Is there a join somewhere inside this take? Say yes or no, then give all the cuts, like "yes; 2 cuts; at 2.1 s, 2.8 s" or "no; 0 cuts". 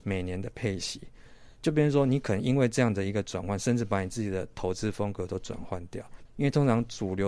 yes; 1 cut; at 6.3 s